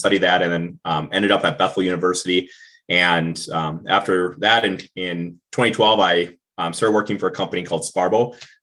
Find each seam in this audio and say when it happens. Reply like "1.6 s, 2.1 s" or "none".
none

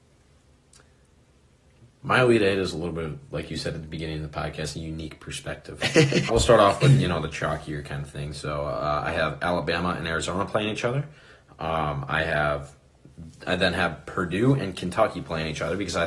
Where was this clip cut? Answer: 6.3 s

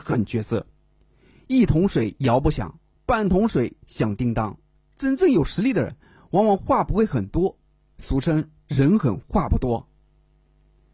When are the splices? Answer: none

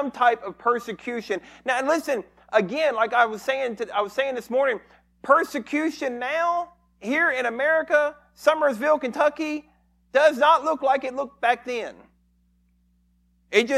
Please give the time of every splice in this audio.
none

